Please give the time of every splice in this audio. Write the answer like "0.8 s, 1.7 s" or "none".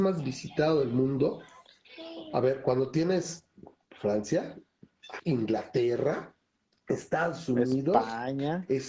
5.2 s

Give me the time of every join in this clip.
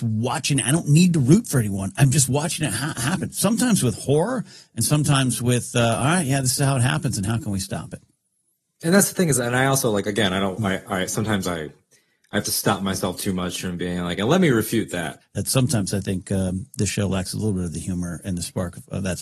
15.2 s

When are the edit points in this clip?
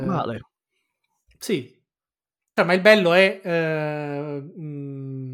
2.6 s

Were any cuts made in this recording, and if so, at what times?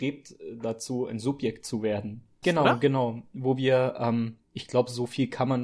2.4 s

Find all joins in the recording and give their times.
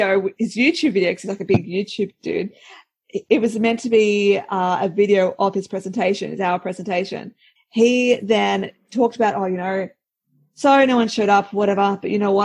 7.6 s

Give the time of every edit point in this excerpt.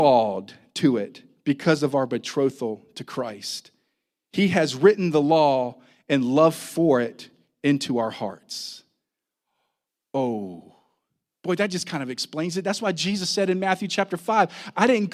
none

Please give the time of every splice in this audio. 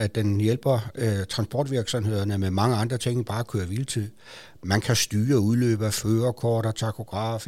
none

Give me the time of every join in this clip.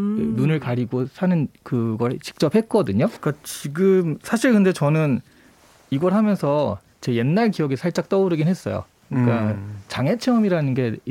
3.2 s

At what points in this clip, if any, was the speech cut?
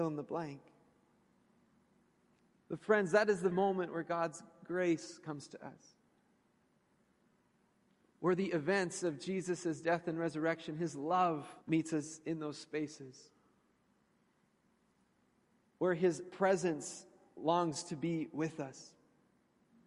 3.5 s, 11.6 s

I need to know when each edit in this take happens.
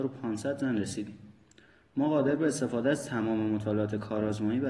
none

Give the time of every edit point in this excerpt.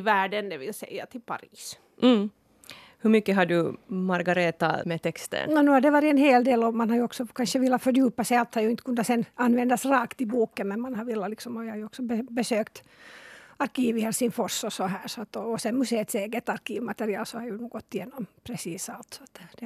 4.8 s

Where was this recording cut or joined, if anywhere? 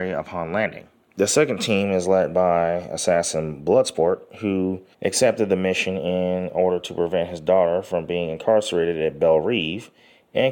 1.1 s, 4.9 s

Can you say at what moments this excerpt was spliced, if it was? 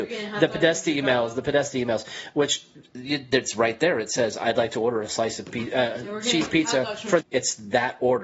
7.2 s

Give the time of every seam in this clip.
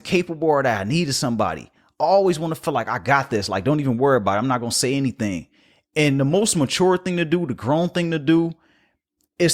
none

